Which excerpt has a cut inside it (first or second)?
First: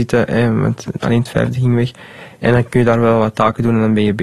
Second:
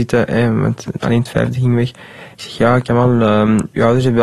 second